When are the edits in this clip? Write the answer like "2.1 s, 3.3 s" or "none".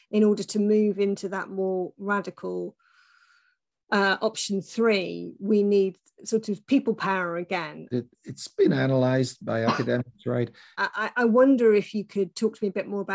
7.9 s, 10.7 s